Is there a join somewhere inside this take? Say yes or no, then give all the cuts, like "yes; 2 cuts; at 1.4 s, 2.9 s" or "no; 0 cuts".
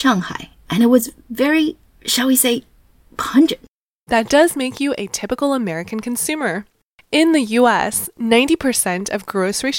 yes; 1 cut; at 4.1 s